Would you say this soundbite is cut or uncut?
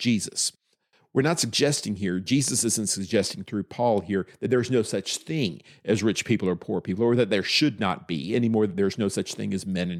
uncut